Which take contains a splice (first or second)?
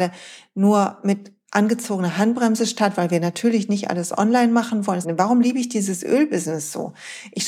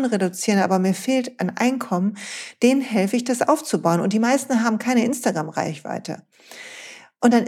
first